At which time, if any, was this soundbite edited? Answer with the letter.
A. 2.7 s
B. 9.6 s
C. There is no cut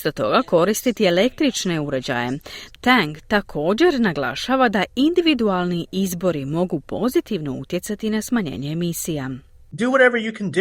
A